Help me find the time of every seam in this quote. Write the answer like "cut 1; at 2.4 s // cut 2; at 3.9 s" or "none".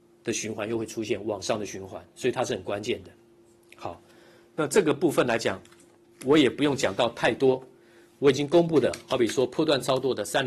none

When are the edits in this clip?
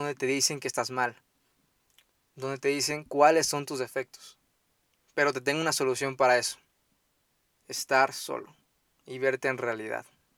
none

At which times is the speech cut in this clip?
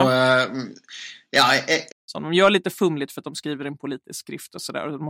cut 1; at 1.9 s

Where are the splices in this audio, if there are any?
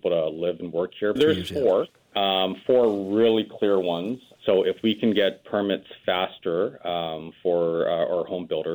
cut 1; at 1.2 s // cut 2; at 4.4 s

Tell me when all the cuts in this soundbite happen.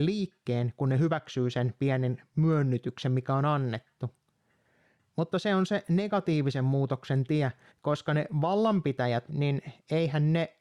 cut 1; at 7.7 s // cut 2; at 9.3 s

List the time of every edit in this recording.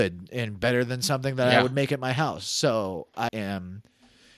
cut 1; at 3.3 s

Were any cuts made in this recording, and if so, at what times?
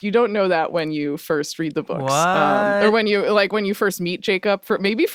none

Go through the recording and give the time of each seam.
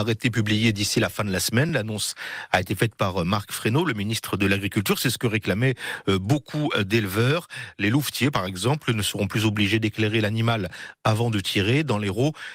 none

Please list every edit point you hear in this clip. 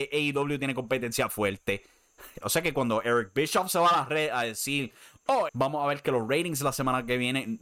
cut 1; at 2.4 s // cut 2; at 5.5 s

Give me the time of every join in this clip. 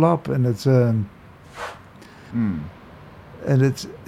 cut 1; at 2.3 s

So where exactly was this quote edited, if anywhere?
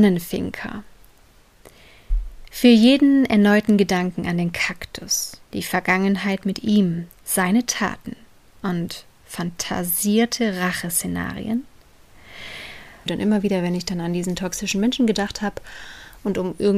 cut 1; at 5.4 s // cut 2; at 13.1 s

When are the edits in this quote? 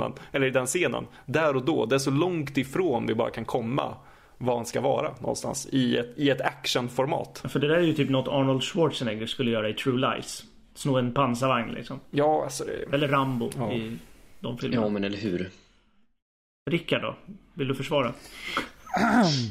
none

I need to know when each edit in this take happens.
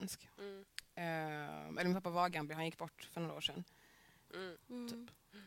cut 1; at 4.3 s

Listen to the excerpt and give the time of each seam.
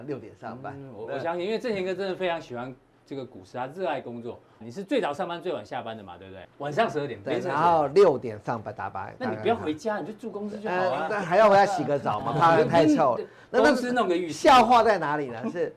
cut 1; at 4.6 s // cut 2; at 6.4 s

